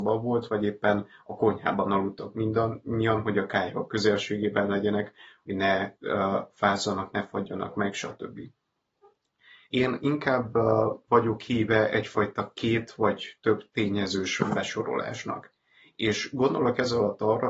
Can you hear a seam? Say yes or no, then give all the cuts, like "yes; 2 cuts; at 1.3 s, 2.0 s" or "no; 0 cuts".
yes; 1 cut; at 9.7 s